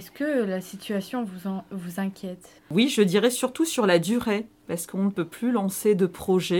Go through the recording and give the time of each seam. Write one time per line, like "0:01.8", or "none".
0:02.6